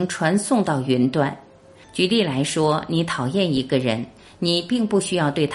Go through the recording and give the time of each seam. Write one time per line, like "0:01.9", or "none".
0:01.8